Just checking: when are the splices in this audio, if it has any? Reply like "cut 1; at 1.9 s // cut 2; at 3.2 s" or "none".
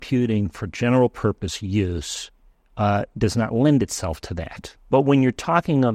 cut 1; at 4.8 s